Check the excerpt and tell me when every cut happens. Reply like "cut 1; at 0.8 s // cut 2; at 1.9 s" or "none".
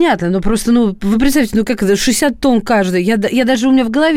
none